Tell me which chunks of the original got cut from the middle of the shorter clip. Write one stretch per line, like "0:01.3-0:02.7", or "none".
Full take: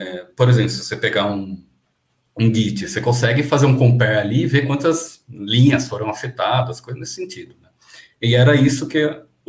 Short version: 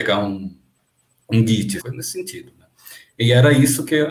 0:02.9-0:06.8

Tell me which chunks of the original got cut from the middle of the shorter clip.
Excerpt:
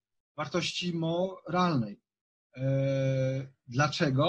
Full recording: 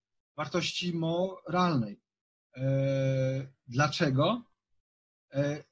none

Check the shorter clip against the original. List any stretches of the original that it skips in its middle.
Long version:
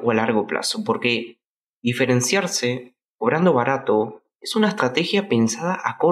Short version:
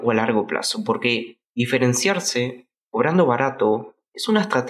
0:01.5-0:01.8

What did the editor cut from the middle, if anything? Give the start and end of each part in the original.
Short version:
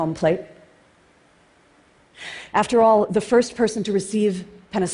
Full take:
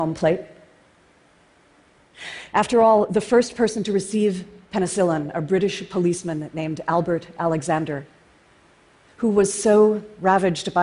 none

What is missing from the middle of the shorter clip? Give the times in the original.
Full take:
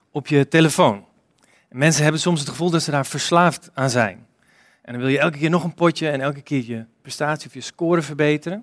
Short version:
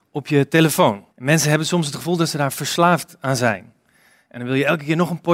0:01.1-0:01.6

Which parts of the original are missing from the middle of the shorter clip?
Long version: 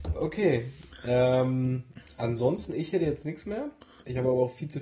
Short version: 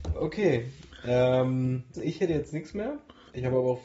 0:01.9-0:02.7

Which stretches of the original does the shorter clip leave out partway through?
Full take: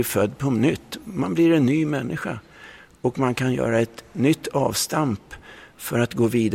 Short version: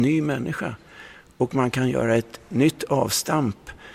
none

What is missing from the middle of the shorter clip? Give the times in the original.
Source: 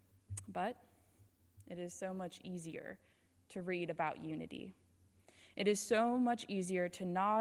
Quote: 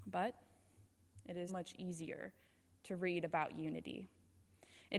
0:01.9-0:02.1

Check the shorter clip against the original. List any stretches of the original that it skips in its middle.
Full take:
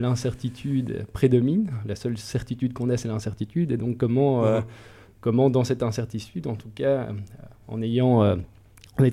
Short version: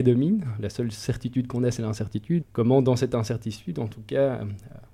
0:03.7-0:05.1

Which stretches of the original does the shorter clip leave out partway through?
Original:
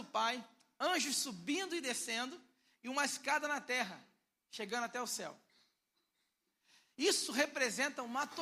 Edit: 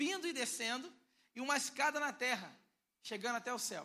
none

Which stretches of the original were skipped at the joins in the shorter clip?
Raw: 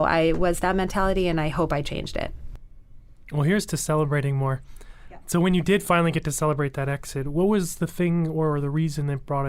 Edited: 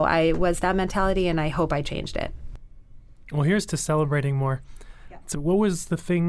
0:05.3-0:07.2

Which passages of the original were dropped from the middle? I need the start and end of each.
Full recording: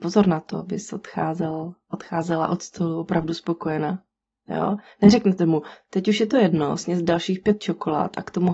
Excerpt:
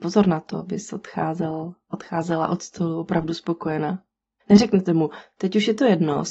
0:04.4-0:04.9

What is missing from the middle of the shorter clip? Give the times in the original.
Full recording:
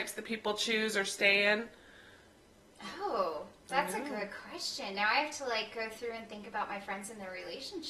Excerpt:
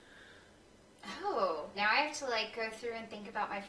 0:03.5-0:04.9

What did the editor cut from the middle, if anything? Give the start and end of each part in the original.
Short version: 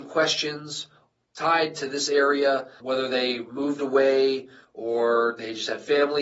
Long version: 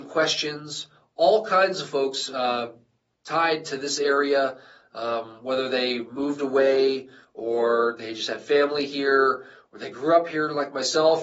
0:01.1-0:03.0
0:04.7-0:05.4

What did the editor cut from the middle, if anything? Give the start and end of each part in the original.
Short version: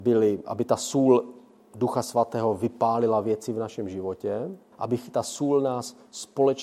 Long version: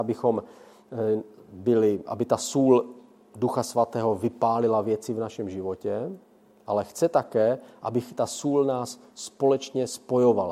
0:06.3-0:07.8

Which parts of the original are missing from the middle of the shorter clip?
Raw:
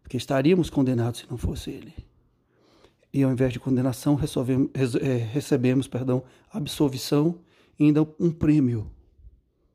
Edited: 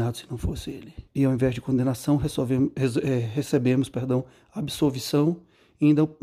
0:02.1-0:03.0

